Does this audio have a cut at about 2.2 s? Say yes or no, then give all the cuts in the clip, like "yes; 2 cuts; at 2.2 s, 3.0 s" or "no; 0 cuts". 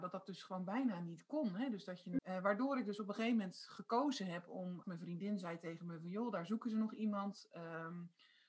yes; 2 cuts; at 2.2 s, 4.8 s